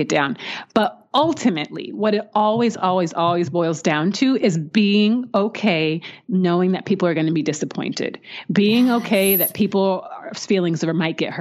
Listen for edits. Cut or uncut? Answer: uncut